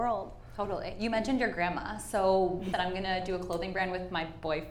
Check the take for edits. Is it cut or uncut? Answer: cut